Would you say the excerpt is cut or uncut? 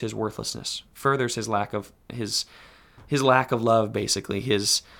uncut